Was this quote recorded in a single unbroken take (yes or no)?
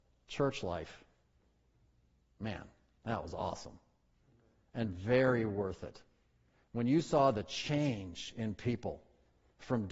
yes